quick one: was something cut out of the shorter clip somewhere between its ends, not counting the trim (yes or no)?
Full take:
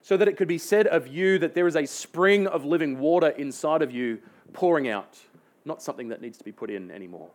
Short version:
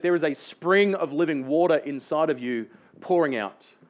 no